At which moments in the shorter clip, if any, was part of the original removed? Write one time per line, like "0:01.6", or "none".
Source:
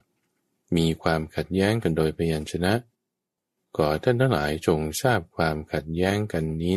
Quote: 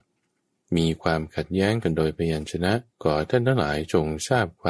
0:02.9

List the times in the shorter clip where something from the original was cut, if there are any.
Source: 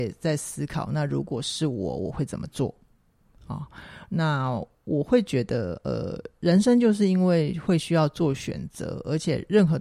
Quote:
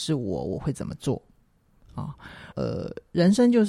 0:02.5

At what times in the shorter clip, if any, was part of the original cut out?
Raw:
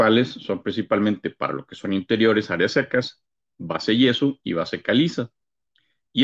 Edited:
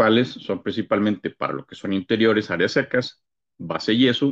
none

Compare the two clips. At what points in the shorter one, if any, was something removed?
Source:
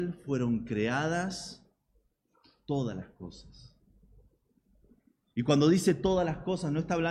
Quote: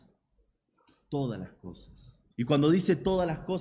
0:02.3

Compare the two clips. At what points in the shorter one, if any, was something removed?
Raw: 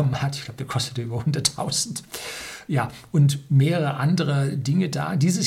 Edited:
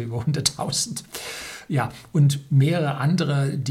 none

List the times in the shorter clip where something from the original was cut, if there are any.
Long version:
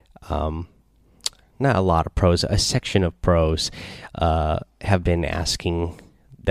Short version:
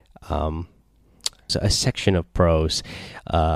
0:01.5

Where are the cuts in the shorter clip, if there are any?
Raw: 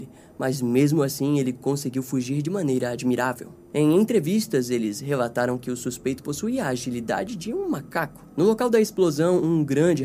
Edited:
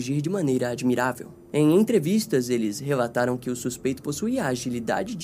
none

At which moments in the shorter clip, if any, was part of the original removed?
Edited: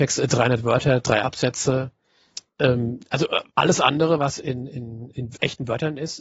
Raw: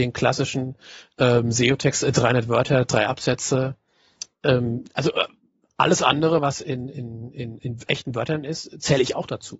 0:03.5
0:05.1

